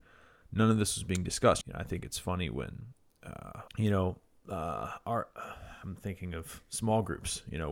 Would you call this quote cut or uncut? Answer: cut